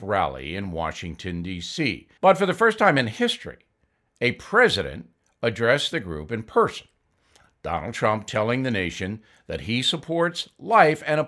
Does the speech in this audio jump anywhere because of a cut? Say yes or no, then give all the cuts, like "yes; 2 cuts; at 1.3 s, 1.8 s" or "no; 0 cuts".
yes; 1 cut; at 2.2 s